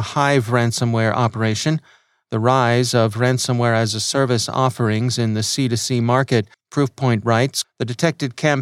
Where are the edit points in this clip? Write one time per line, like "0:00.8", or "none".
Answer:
0:06.5
0:07.6